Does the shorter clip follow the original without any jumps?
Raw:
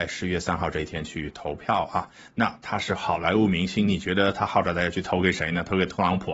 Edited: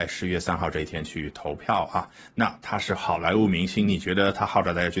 yes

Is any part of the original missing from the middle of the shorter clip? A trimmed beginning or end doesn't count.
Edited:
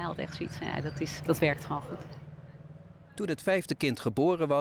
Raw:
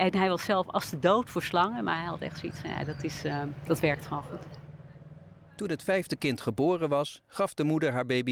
yes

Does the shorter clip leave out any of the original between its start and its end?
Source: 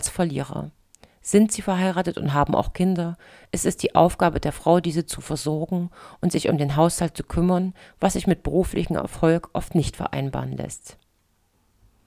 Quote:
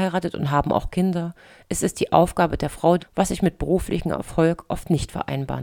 yes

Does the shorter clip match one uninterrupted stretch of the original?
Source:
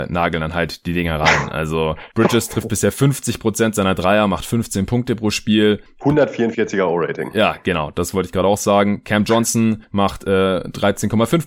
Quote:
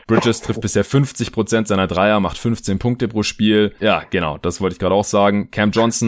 no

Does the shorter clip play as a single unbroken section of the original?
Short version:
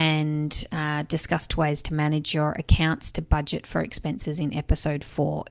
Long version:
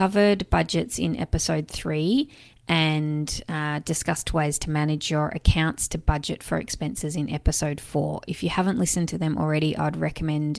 yes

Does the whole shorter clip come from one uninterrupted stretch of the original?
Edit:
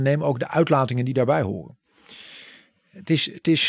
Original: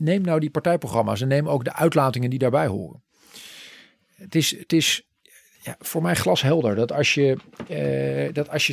yes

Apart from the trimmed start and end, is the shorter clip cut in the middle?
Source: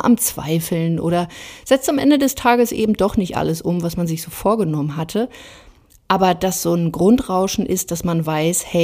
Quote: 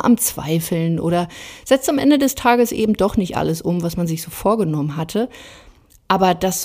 no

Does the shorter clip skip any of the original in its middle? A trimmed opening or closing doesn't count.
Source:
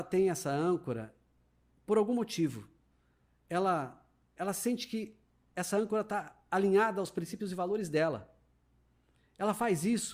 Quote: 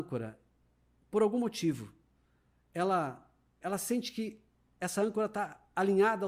no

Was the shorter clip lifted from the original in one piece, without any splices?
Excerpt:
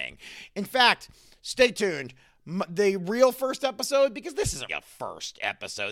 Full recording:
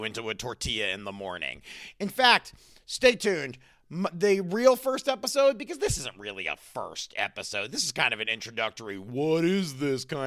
no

